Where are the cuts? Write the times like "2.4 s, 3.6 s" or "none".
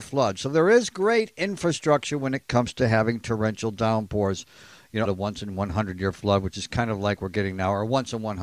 5.0 s